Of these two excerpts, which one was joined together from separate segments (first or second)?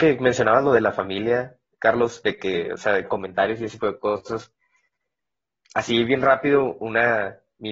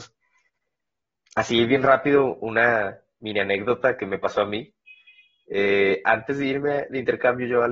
first